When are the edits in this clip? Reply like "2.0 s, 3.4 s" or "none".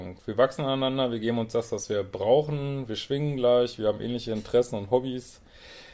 none

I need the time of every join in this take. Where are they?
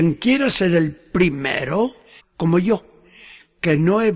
2.2 s

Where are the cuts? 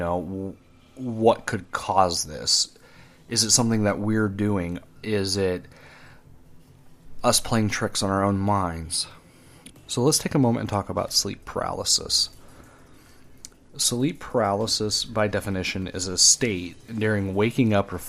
5.0 s, 9.7 s

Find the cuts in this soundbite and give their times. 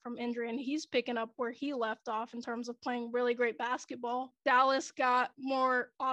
none

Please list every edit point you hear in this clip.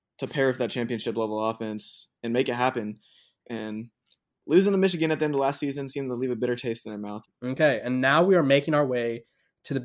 3.4 s, 7.2 s

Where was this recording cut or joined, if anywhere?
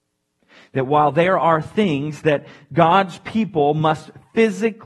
none

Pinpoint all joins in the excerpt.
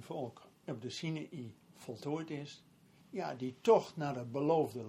3.0 s

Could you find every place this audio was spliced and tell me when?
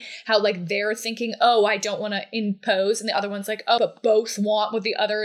3.8 s

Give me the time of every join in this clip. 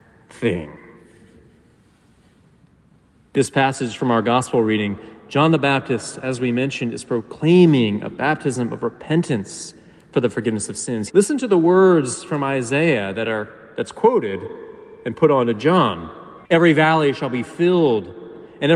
11.1 s, 16.4 s

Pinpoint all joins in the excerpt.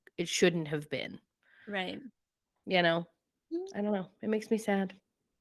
none

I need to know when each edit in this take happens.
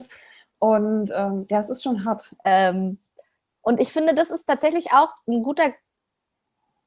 2.4 s

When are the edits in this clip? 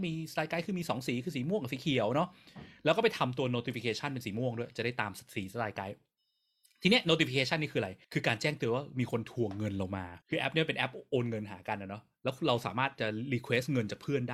8.0 s, 10.2 s

